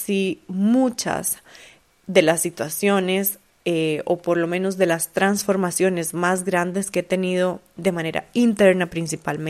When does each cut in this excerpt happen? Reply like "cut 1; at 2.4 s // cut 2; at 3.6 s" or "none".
none